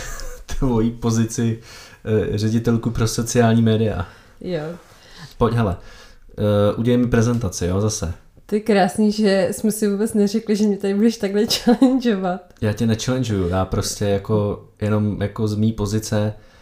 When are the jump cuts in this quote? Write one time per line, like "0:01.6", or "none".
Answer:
0:05.3